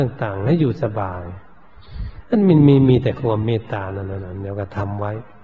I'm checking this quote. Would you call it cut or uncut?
uncut